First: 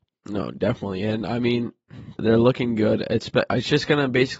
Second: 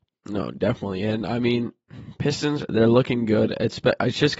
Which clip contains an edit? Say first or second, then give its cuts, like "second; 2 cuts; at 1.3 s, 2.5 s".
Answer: first; 1 cut; at 2.2 s